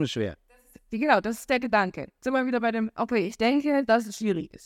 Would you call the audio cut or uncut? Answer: uncut